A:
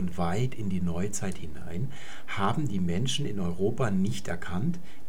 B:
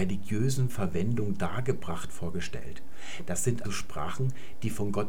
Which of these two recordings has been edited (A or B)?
B